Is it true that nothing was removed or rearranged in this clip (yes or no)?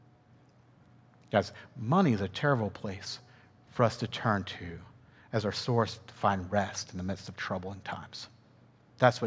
yes